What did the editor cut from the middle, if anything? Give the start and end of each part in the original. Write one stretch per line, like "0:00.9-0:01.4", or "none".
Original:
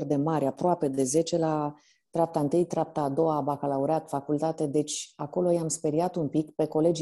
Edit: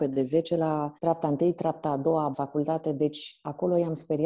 0:01.8-0:02.1
0:03.5-0:04.1